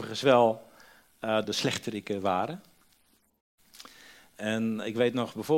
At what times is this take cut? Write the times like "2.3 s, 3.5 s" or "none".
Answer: 1.4 s

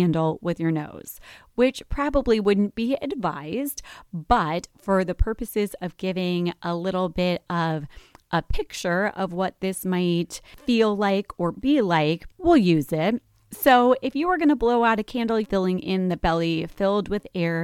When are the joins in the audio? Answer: 15.4 s

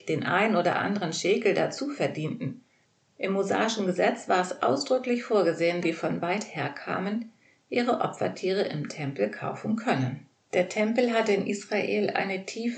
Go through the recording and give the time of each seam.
5.8 s, 10.4 s

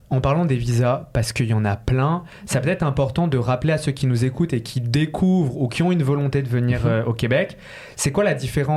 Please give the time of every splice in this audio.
none

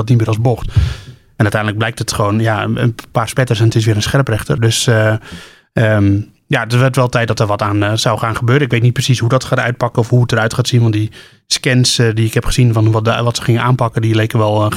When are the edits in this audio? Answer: 4.6 s

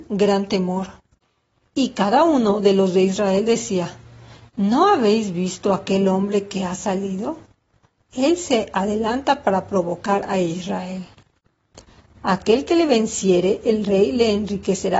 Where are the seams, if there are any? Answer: none

